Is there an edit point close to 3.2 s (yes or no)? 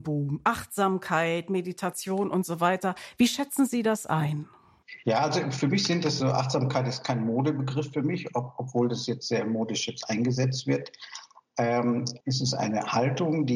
no